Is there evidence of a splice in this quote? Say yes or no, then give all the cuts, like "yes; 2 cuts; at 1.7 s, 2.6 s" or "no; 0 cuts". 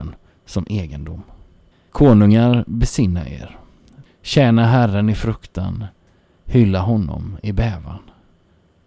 yes; 2 cuts; at 1.9 s, 4.0 s